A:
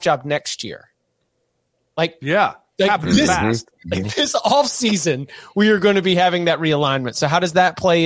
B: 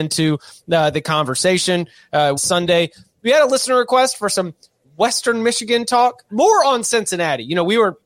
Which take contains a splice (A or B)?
B